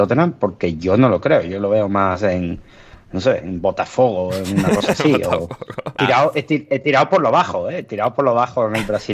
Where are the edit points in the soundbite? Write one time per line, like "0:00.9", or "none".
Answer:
0:06.0